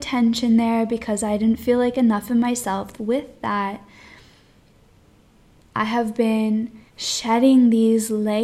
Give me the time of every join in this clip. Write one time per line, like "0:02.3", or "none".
0:02.9
0:06.9